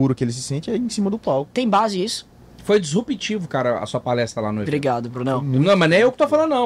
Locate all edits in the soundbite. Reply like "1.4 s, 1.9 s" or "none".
none

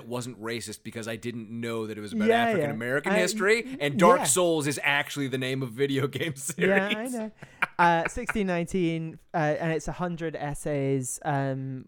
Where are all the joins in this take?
none

